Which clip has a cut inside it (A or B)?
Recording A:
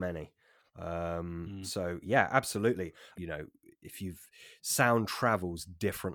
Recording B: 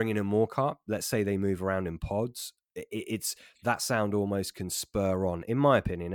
A